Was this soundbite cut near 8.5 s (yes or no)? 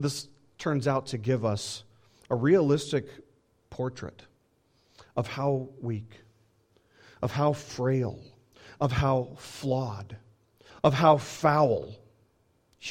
no